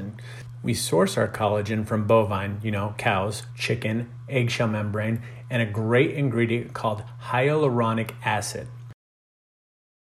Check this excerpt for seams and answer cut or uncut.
cut